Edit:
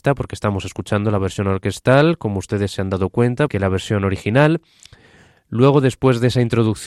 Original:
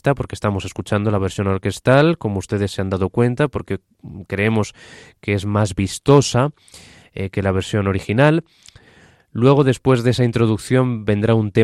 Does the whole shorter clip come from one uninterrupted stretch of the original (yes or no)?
no